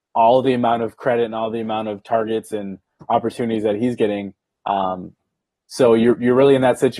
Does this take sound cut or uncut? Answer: uncut